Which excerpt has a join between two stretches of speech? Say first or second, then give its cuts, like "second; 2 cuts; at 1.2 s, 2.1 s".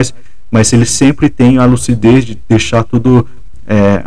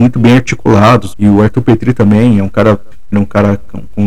second; 2 cuts; at 1.1 s, 3.1 s